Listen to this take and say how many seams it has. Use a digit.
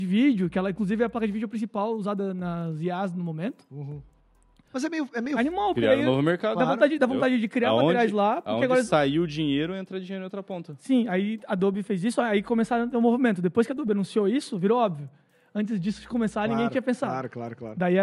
1